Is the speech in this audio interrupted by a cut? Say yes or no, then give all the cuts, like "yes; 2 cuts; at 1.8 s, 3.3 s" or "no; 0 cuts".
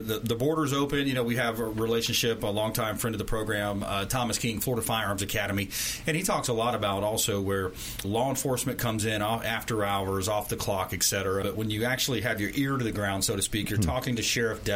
yes; 2 cuts; at 8.0 s, 11.4 s